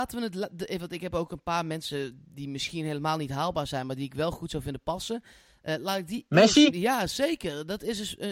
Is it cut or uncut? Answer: cut